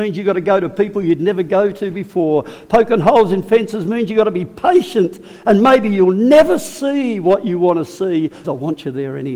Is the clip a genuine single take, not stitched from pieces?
no; 1 cut; at 8.4 s

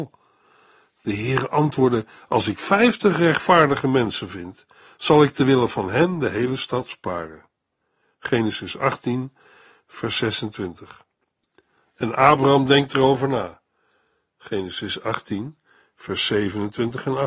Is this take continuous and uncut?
yes; 0 cuts

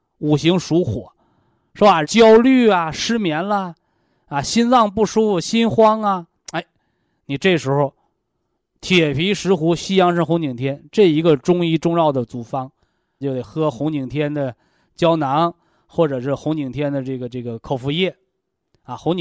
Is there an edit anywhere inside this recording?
yes; 2 cuts; at 2.0 s, 13.2 s

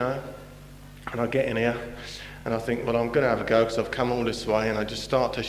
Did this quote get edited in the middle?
no; 0 cuts

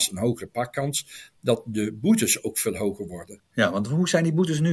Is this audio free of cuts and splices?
no; 1 cut; at 3.4 s

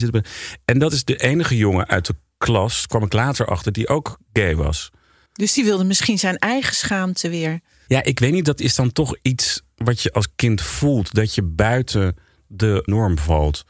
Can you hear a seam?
yes; 1 cut; at 5.3 s

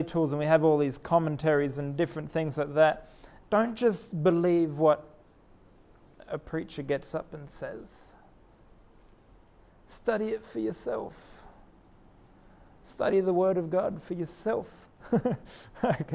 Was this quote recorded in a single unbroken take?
no; 2 cuts; at 3.4 s, 14.9 s

